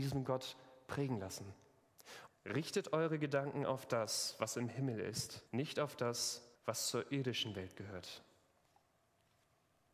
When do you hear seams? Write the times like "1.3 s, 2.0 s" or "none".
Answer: 2.3 s, 5.5 s, 6.6 s